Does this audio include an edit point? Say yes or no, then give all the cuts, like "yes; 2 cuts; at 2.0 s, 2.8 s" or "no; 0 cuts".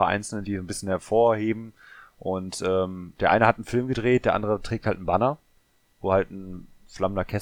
no; 0 cuts